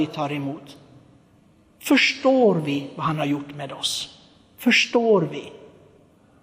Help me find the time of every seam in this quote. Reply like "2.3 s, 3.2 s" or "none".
none